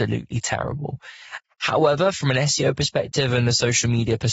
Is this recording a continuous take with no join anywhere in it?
no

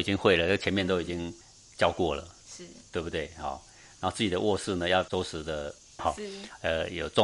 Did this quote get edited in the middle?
yes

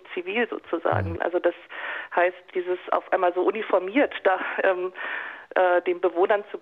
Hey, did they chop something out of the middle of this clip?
yes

